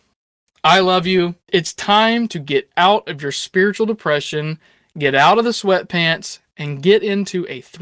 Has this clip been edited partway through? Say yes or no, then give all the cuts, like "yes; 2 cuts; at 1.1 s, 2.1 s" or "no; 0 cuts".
yes; 1 cut; at 1.4 s